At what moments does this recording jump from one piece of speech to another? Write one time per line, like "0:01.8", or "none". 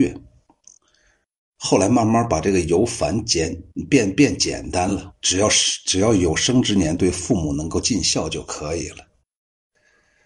0:05.1